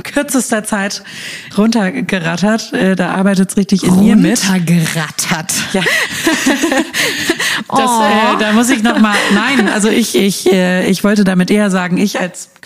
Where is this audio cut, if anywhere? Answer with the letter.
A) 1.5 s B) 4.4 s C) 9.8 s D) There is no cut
A